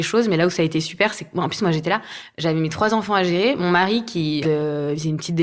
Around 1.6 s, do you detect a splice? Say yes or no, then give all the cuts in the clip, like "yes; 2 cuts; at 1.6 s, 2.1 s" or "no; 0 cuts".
no; 1 cut; at 4.4 s